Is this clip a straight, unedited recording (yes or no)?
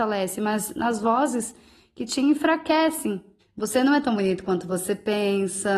no